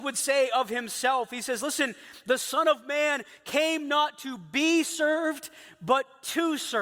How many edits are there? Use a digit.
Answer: 0